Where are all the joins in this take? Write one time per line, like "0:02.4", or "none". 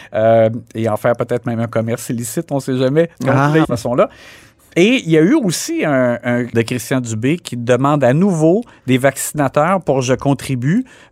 0:03.6
0:06.5